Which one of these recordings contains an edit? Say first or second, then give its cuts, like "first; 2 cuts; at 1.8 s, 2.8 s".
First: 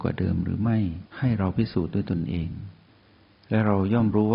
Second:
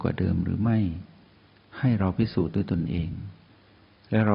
first; 1 cut; at 1.1 s